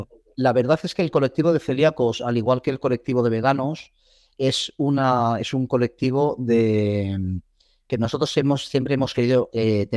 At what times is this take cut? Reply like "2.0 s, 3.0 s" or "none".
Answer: none